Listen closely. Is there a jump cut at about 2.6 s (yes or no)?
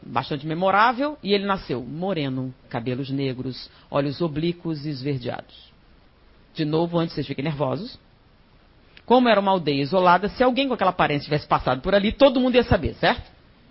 yes